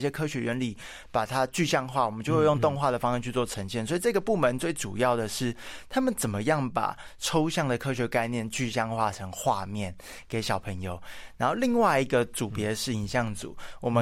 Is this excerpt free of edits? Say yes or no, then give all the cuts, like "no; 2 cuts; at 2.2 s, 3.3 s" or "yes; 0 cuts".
yes; 0 cuts